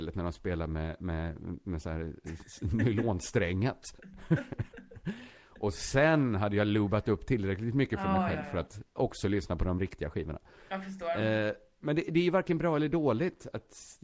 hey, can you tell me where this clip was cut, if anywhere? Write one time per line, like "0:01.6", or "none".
none